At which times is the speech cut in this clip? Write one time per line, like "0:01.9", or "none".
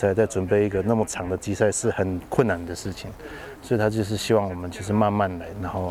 none